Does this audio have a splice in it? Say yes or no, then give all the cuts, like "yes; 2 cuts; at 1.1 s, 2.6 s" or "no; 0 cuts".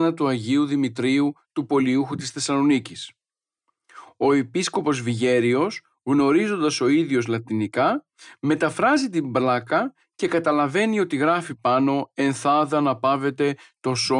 no; 0 cuts